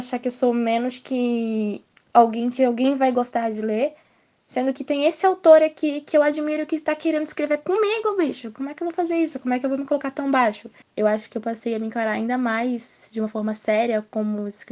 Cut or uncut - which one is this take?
cut